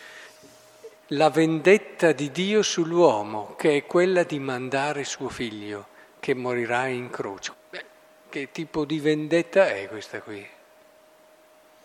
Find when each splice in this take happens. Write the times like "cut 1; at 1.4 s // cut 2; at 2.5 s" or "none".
cut 1; at 1.0 s // cut 2; at 7.5 s